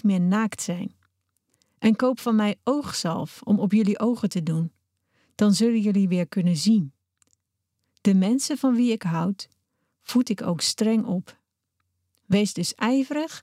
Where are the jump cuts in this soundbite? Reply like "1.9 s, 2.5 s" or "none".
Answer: none